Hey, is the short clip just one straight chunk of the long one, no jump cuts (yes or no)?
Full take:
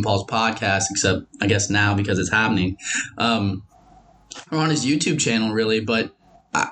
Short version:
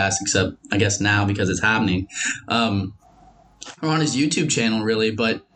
yes